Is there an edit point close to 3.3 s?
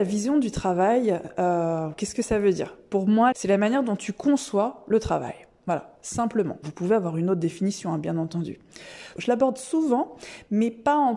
yes; 2 cuts; at 3.3 s, 9.2 s

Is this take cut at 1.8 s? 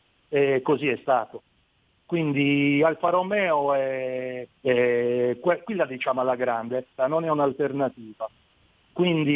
no; 2 cuts; at 4.6 s, 7.0 s

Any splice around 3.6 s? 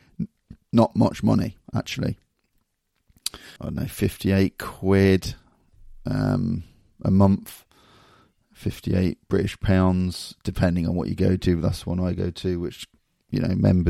yes; 1 cut; at 3.6 s

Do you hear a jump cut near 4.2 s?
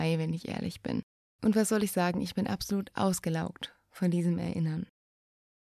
no; 1 cut; at 1.2 s

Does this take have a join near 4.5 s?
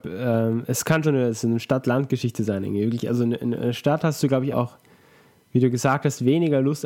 yes; 2 cuts; at 1.0 s, 4.5 s

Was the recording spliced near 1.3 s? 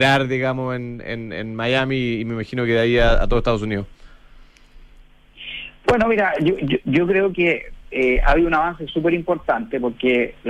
no; 0 cuts

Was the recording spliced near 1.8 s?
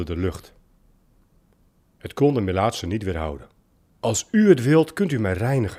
no; 1 cut; at 3.9 s

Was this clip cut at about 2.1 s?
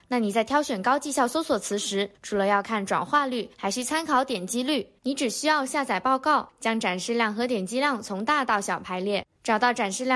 no; 1 cut; at 5.0 s

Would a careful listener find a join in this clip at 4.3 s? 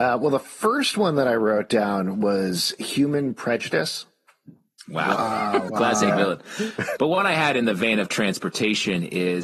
no; 2 cuts; at 5.7 s, 7.0 s

